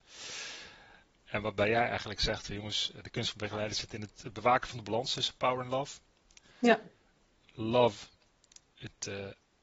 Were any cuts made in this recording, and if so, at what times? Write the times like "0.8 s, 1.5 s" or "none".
1.2 s